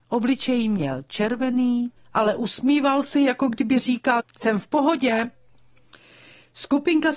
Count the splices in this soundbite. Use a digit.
2